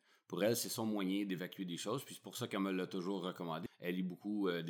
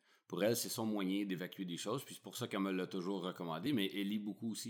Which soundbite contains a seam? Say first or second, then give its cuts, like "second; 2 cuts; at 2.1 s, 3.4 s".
first; 1 cut; at 3.7 s